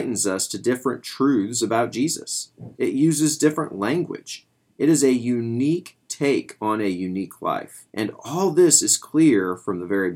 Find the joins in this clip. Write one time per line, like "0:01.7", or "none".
0:02.7
0:07.9